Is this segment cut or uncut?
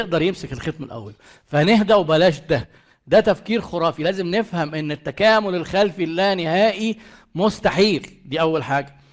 uncut